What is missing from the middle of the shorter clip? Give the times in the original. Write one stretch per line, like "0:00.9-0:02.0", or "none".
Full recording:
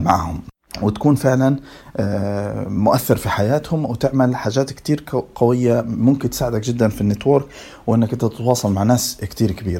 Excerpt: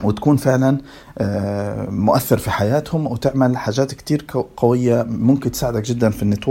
none